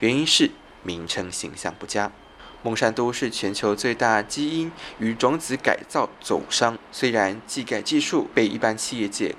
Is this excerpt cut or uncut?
uncut